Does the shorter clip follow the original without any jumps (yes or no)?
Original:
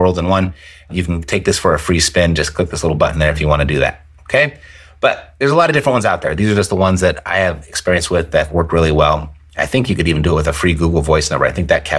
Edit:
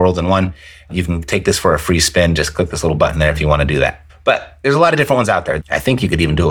no